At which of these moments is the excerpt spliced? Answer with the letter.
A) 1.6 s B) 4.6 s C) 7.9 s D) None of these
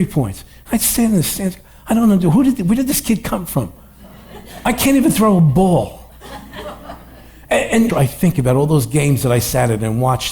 C